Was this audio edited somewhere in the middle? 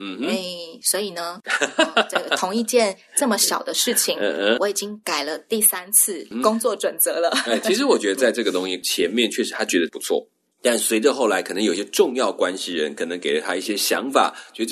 no; 0 cuts

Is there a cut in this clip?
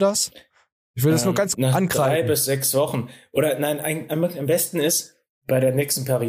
yes; 1 cut; at 1.5 s

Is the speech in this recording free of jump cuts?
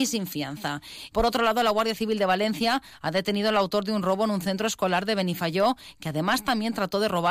no; 1 cut; at 1.1 s

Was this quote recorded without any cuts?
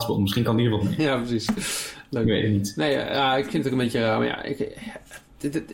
yes; 0 cuts

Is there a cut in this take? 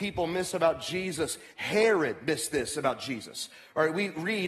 no; 0 cuts

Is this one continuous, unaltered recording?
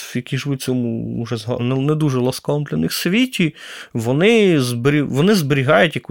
no; 1 cut; at 1.6 s

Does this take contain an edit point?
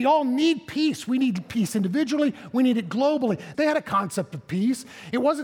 yes; 2 cuts; at 2.5 s, 3.5 s

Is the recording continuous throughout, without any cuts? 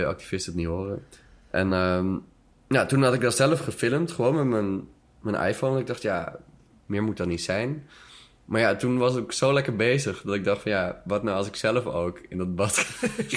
yes; 0 cuts

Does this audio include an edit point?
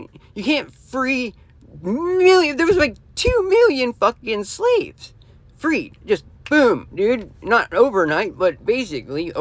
no; 0 cuts

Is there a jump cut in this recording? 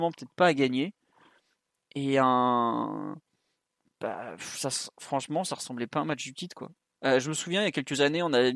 no; 0 cuts

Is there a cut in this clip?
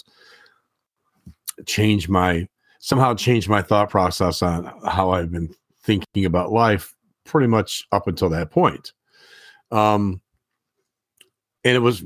no; 0 cuts

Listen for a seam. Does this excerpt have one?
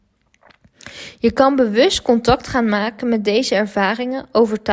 no; 0 cuts

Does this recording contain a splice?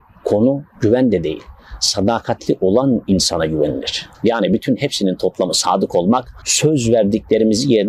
yes; 2 cuts; at 4.1 s, 6.4 s

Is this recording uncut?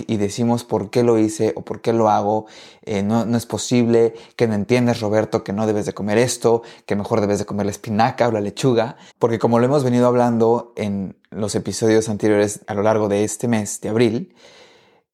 no; 1 cut; at 9.1 s

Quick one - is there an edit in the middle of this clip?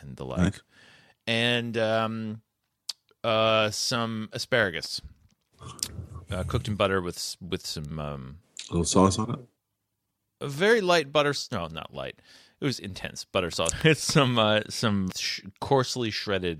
yes; 2 cuts; at 13.7 s, 15.1 s

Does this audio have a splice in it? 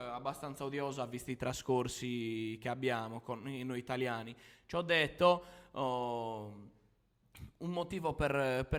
no; 0 cuts

